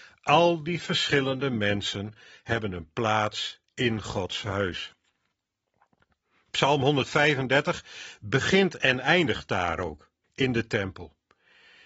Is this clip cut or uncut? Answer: cut